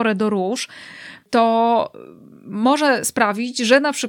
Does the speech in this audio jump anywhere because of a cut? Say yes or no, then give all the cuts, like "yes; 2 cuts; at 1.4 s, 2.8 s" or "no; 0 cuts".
no; 0 cuts